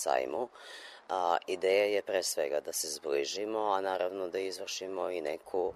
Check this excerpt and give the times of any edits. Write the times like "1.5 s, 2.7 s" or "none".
none